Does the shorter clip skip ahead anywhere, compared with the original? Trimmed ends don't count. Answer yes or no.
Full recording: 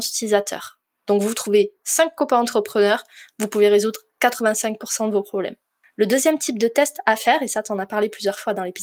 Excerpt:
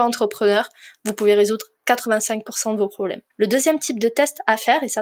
yes